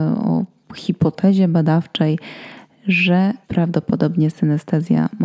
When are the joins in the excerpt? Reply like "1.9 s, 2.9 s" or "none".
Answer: 3.4 s

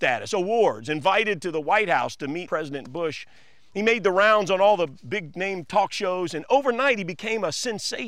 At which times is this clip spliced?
2.5 s

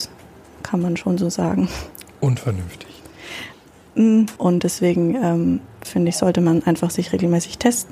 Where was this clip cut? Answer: 4.4 s, 5.8 s

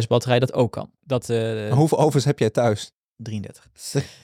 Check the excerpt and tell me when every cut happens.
1.0 s

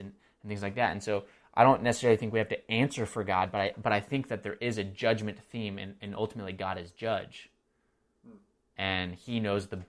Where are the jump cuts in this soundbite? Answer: none

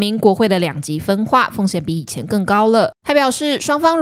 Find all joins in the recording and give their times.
none

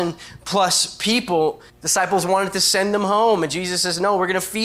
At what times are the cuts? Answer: 1.7 s

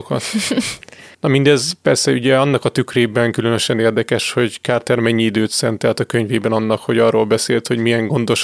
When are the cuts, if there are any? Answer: 1.1 s

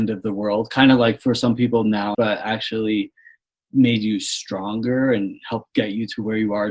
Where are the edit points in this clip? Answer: 2.1 s

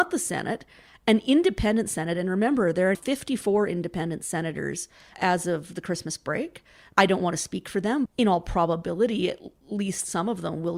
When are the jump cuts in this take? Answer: 2.9 s, 6.9 s, 8.1 s

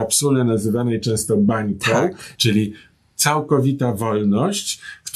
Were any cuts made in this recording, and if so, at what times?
2.3 s

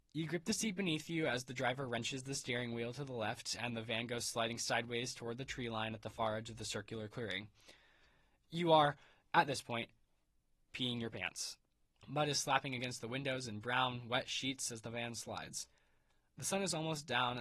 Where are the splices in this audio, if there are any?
12.0 s

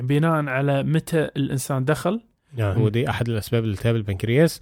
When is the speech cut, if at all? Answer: 2.7 s

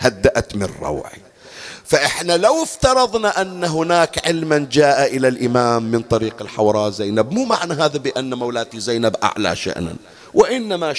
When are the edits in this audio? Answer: none

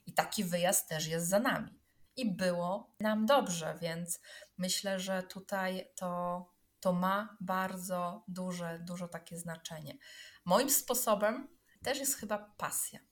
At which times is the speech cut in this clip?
2.1 s

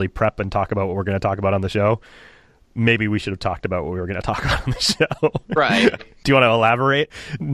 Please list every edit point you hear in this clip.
6.0 s

